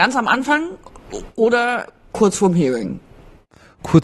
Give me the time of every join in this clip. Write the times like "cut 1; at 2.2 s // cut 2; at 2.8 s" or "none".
none